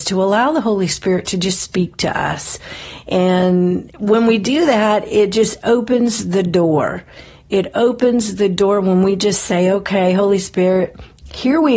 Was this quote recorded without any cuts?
yes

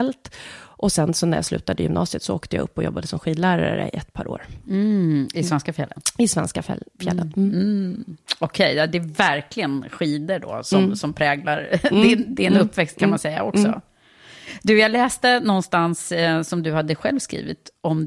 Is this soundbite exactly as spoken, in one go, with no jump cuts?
yes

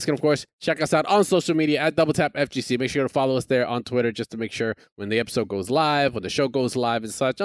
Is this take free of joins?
yes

